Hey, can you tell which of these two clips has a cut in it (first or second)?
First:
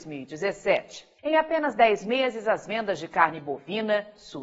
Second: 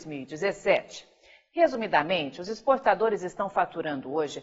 first